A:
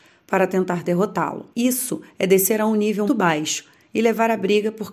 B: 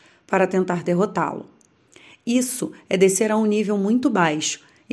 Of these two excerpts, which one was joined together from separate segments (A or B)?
A